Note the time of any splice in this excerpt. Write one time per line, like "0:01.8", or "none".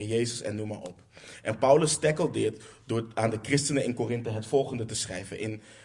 none